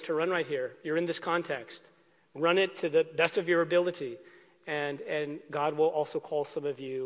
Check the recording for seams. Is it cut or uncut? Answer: uncut